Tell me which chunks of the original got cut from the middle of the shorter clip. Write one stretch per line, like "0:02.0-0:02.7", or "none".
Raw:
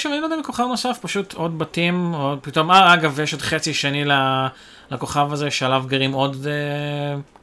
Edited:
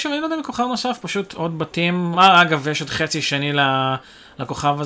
0:02.1-0:02.7